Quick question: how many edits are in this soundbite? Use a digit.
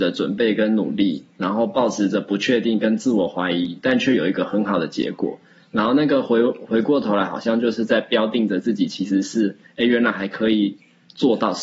0